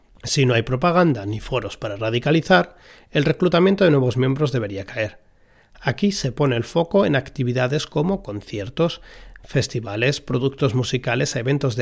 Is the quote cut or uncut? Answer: uncut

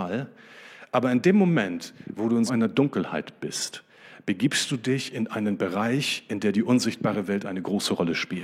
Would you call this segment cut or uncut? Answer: cut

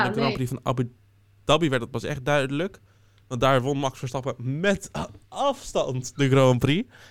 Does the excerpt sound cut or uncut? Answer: uncut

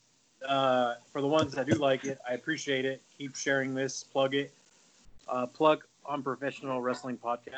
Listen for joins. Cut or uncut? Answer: uncut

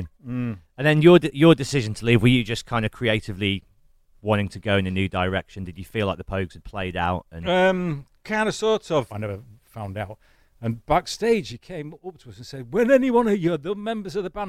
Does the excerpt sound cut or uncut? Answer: cut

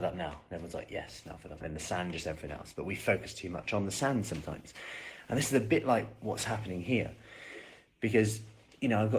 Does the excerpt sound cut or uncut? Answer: cut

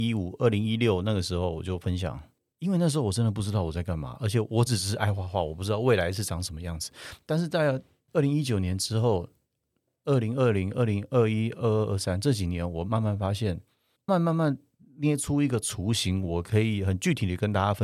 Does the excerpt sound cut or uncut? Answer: cut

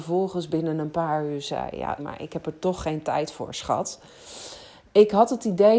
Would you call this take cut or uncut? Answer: cut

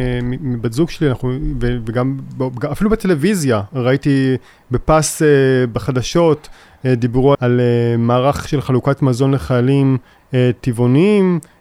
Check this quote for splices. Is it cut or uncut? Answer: cut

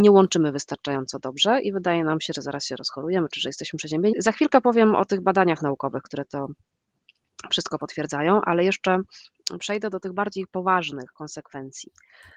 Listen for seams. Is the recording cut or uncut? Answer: cut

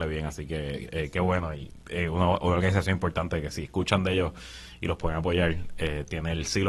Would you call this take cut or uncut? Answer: uncut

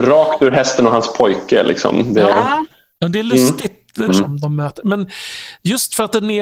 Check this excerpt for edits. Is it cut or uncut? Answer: cut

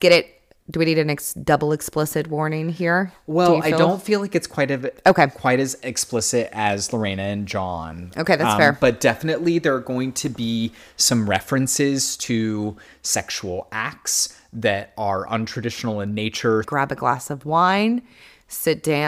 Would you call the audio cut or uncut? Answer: uncut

